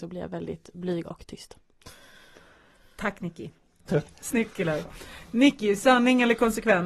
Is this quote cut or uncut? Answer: cut